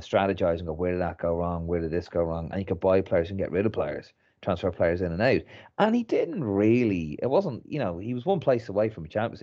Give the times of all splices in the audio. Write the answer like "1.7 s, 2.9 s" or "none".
2.5 s